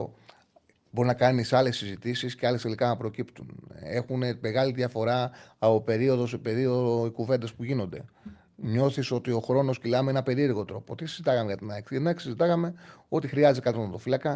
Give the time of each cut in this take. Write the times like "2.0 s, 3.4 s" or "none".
none